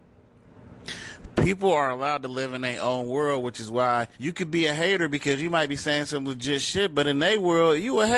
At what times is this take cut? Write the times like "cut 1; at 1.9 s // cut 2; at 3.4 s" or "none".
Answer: cut 1; at 4.1 s

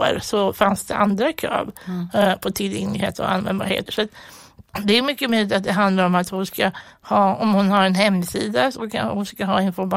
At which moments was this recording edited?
cut 1; at 3.9 s

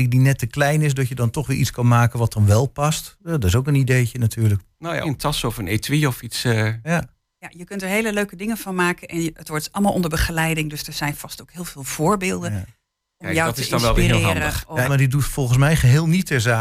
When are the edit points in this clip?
cut 1; at 5.0 s // cut 2; at 14.8 s

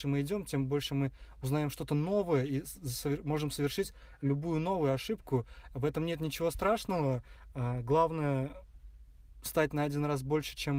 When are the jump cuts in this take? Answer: none

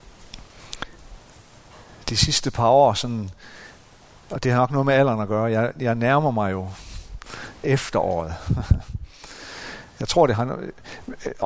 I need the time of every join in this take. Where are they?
none

